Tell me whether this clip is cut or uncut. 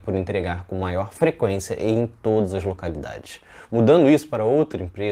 uncut